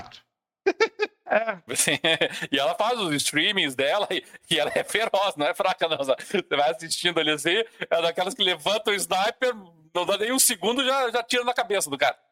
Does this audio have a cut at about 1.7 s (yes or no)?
yes